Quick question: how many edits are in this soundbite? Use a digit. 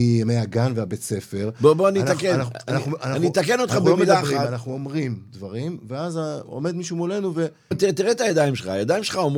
1